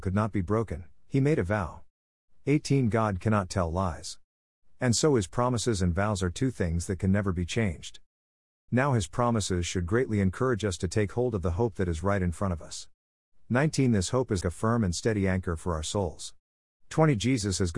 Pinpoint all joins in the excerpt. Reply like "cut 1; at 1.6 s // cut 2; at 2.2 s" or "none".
cut 1; at 8.7 s // cut 2; at 14.4 s // cut 3; at 16.7 s